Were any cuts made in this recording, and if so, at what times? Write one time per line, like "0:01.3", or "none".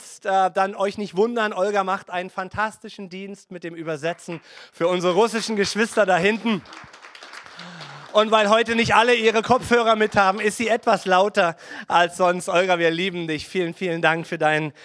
none